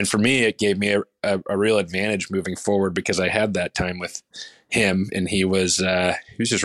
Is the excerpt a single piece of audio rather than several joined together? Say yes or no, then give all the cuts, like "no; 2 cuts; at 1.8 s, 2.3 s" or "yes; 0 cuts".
yes; 0 cuts